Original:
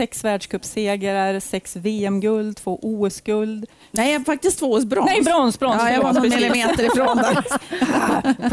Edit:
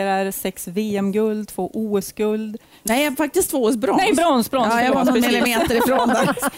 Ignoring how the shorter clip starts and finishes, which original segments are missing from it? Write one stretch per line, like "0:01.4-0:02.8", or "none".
none